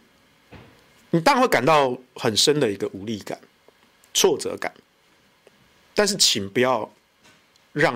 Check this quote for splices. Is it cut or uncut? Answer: uncut